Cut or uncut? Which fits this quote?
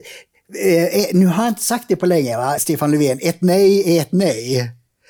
cut